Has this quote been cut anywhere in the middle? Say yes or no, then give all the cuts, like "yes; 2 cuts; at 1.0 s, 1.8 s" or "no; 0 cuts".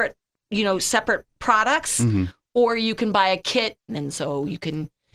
yes; 1 cut; at 3.9 s